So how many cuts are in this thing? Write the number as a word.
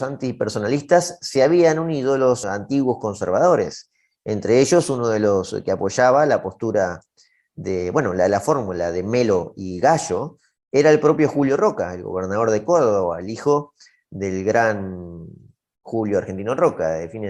one